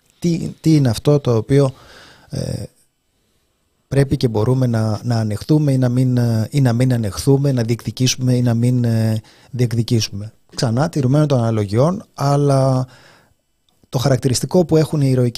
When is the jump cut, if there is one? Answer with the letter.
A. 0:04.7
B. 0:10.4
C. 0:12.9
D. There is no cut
D